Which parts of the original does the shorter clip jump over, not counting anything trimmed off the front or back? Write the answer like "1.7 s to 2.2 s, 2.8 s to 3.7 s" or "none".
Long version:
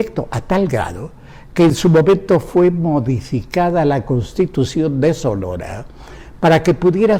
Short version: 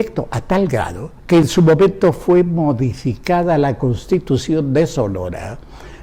1.2 s to 1.5 s